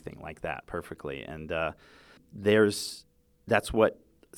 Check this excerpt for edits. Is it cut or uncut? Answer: uncut